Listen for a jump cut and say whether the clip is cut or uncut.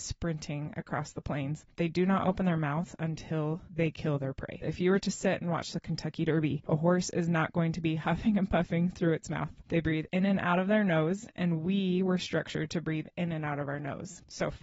uncut